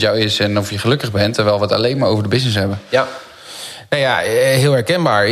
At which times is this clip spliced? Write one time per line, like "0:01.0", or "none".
none